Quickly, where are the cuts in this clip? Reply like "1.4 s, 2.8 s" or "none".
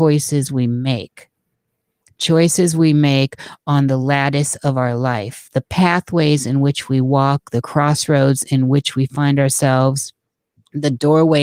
none